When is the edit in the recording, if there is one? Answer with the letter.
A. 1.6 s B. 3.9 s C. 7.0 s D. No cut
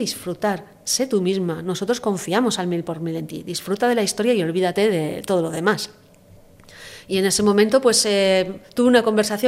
D